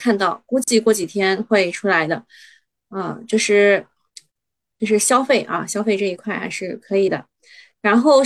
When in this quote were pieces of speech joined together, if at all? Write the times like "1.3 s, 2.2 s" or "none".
none